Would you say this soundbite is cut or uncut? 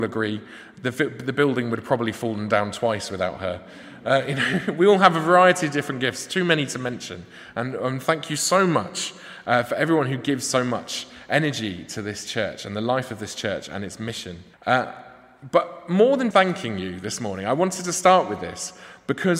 cut